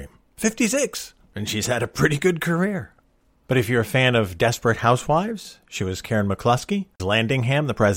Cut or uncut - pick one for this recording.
cut